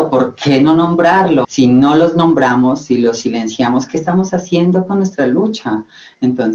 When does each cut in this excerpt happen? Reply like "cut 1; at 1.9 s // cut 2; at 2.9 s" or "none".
cut 1; at 1.4 s